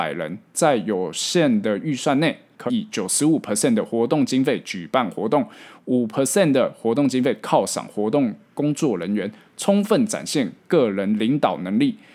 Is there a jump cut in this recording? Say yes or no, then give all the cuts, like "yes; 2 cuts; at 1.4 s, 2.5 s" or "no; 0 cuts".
yes; 1 cut; at 2.7 s